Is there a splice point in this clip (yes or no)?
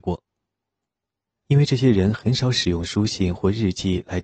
yes